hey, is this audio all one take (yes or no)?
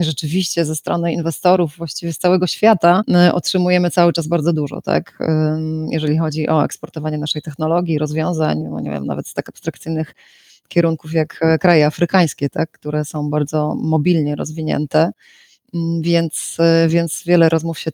yes